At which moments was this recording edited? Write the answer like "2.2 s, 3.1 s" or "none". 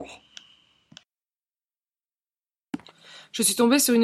none